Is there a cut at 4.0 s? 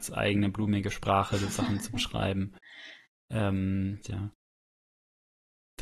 yes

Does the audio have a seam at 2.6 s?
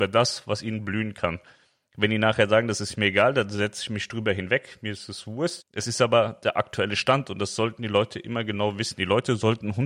no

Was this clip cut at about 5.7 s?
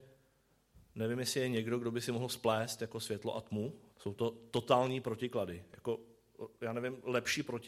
no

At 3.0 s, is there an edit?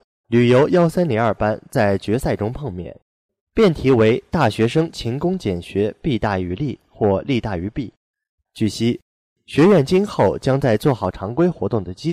no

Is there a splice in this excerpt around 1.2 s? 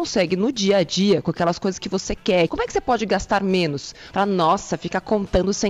no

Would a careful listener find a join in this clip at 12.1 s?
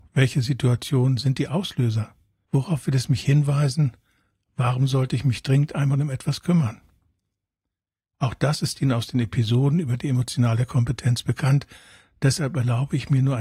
no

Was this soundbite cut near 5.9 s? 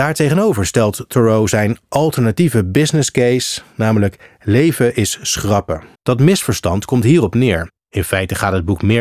yes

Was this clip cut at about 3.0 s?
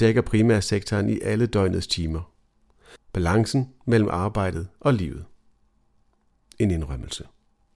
yes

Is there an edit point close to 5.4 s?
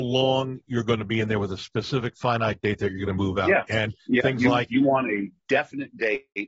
yes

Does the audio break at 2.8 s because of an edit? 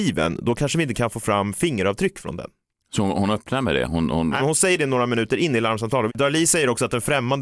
no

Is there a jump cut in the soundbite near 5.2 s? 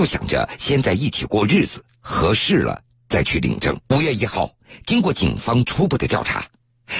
no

